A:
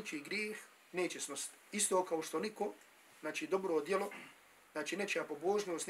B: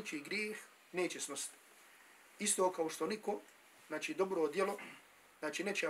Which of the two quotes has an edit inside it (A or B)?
A